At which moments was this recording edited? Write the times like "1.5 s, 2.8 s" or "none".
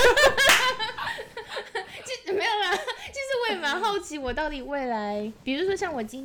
none